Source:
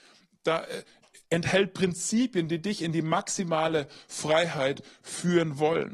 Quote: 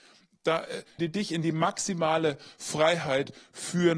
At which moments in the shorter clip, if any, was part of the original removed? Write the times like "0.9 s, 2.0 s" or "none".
1.0 s